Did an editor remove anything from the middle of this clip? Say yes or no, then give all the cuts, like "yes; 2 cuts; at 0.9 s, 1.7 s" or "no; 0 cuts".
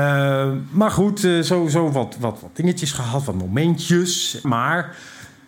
yes; 2 cuts; at 2.4 s, 4.4 s